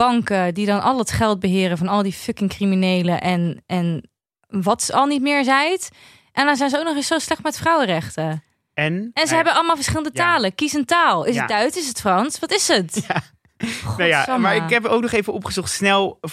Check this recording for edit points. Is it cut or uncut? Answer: uncut